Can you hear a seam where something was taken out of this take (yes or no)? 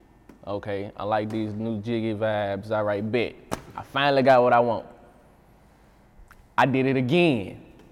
yes